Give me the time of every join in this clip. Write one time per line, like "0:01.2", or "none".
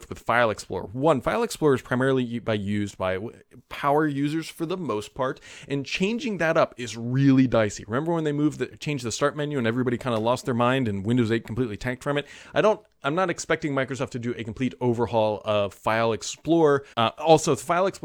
0:16.9